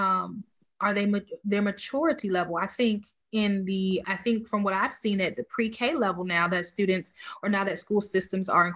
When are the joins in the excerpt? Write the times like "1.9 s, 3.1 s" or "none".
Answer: 4.0 s